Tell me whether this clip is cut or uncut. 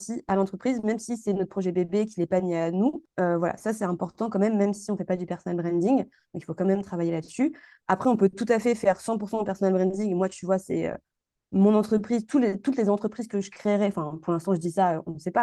uncut